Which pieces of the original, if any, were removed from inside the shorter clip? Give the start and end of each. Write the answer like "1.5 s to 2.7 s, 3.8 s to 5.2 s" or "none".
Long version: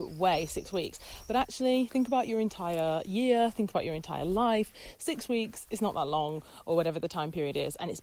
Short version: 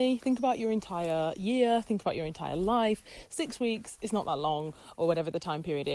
none